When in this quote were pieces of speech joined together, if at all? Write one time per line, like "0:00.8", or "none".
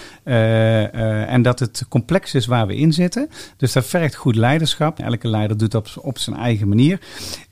0:05.0